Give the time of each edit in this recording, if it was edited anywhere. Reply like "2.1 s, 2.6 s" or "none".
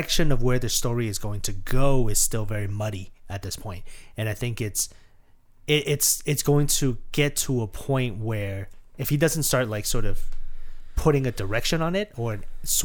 none

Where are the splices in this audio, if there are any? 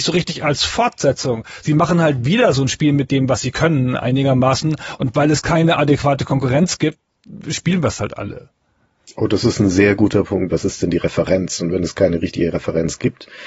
10.5 s

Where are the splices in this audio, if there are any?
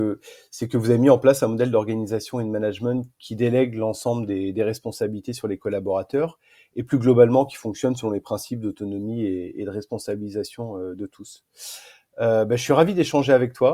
none

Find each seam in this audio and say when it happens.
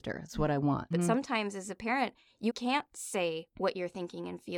0.9 s, 2.5 s

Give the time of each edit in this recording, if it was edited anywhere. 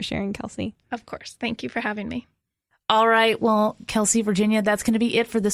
none

